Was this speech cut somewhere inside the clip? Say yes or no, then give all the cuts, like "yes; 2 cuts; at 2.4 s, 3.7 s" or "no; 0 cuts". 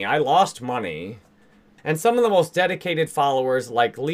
yes; 1 cut; at 1.8 s